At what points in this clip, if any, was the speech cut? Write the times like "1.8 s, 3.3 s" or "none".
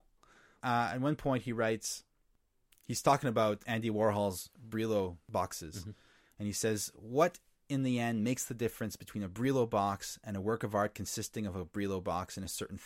none